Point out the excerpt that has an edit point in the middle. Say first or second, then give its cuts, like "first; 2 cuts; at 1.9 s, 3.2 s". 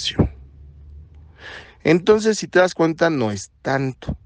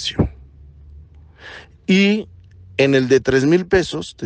first; 1 cut; at 1.6 s